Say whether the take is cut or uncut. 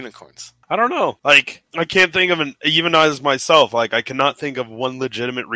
uncut